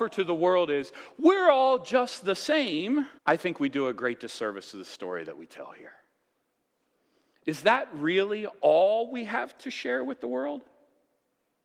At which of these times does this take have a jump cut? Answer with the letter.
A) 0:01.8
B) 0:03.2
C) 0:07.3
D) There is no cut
B